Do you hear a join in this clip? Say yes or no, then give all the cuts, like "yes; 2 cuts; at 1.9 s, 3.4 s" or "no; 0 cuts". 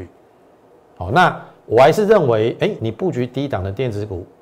yes; 1 cut; at 2.8 s